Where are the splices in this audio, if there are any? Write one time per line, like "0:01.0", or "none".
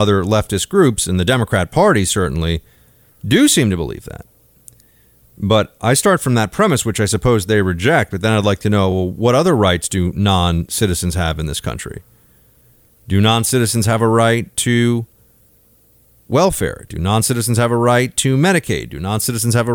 none